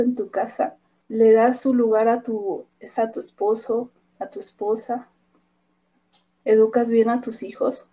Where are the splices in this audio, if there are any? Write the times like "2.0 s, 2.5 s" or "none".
1.0 s, 3.0 s

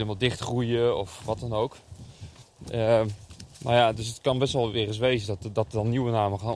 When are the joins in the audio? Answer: none

